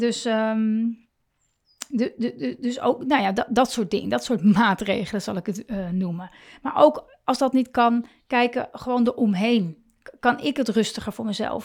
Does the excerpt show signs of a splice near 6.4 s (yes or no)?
no